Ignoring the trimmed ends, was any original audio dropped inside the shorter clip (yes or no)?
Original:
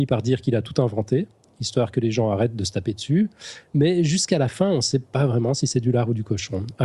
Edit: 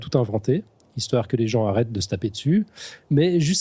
no